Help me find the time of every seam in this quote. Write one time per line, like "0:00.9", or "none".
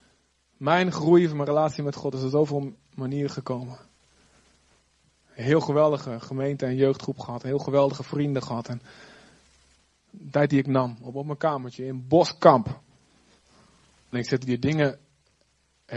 0:10.1
0:14.1

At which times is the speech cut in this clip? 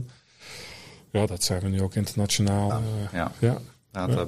0:01.3
0:02.7

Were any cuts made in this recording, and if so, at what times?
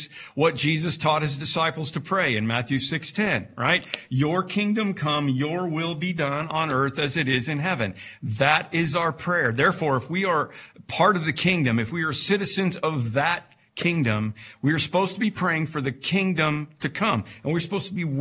none

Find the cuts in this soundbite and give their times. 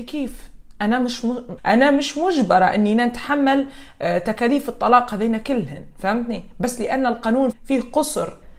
0:01.6
0:07.5

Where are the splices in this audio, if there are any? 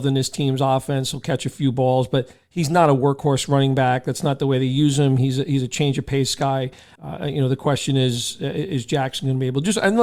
0:06.9

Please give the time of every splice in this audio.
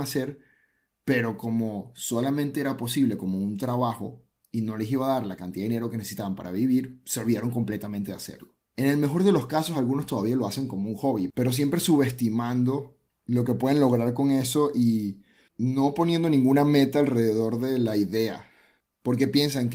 none

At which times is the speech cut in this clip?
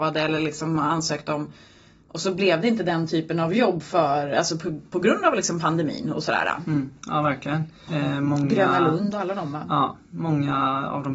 0:07.9

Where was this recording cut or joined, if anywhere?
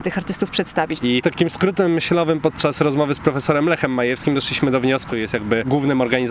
0:01.0
0:05.1

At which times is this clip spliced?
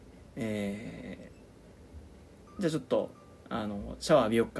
none

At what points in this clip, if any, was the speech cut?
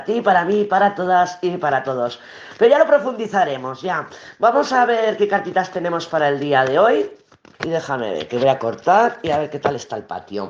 0:07.5

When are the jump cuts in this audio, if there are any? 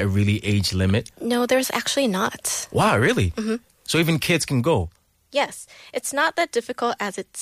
none

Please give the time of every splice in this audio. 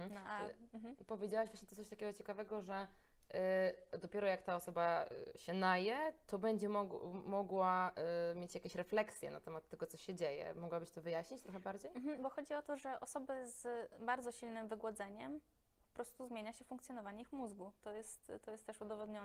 none

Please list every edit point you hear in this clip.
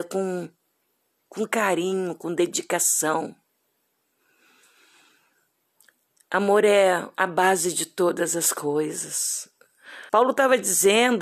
0:10.1

